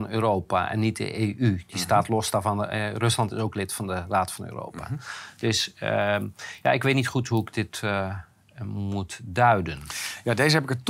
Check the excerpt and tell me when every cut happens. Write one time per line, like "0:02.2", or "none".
none